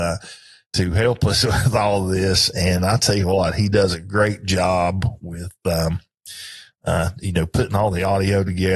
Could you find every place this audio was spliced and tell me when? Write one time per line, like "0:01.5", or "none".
none